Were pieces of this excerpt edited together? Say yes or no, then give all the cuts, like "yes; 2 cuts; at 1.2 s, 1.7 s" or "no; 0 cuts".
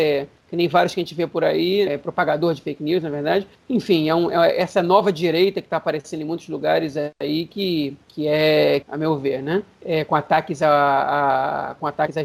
yes; 2 cuts; at 1.9 s, 8.8 s